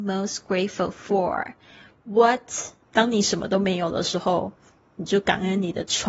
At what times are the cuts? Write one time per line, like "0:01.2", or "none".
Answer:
0:02.8